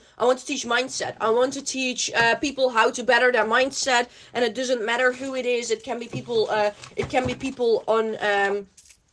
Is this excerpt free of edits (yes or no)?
yes